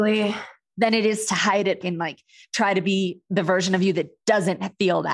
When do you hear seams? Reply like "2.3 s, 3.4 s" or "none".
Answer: 1.8 s